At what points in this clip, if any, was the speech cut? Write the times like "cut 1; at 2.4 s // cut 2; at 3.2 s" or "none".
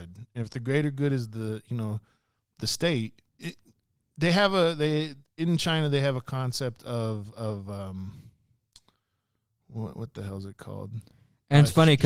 cut 1; at 3.3 s